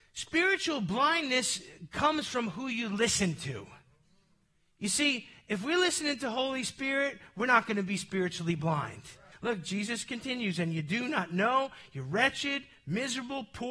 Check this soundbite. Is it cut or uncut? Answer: cut